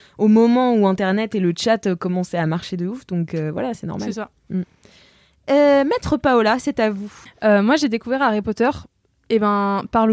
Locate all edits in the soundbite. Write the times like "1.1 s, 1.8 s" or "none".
none